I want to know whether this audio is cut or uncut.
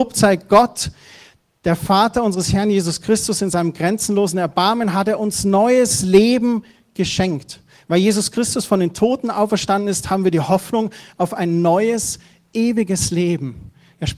uncut